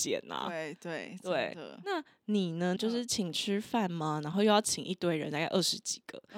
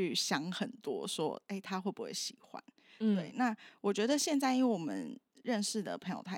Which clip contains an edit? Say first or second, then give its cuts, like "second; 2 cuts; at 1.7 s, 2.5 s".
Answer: first; 1 cut; at 2.8 s